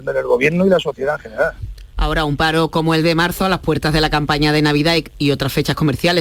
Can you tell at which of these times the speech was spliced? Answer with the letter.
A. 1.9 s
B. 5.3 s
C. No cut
A